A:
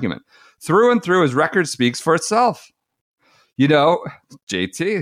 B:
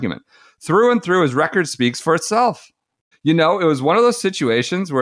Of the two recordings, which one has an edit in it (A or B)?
B